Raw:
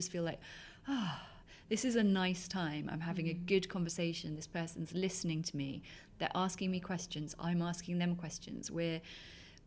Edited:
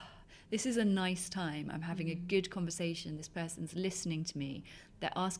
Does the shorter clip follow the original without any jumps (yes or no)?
yes